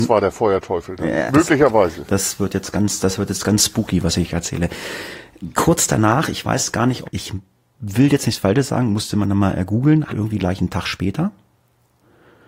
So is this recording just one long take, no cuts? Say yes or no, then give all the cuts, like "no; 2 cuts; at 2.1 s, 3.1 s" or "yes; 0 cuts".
no; 3 cuts; at 1.3 s, 7.0 s, 10.1 s